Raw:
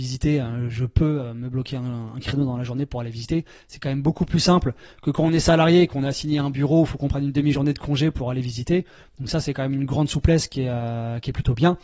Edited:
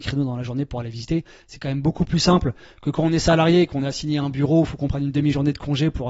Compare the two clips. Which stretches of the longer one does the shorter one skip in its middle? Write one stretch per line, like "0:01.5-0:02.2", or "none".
none